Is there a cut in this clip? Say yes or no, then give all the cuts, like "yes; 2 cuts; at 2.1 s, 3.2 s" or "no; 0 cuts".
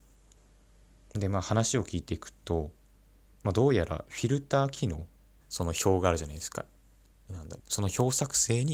yes; 2 cuts; at 5.4 s, 7.6 s